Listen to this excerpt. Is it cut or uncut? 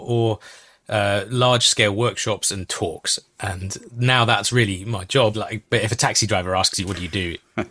cut